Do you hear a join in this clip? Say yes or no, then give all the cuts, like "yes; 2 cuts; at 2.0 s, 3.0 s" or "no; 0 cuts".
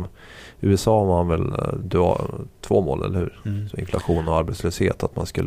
no; 0 cuts